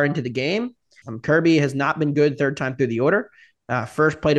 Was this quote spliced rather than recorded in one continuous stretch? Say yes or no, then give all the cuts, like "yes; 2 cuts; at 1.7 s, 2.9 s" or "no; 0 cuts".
yes; 1 cut; at 1.0 s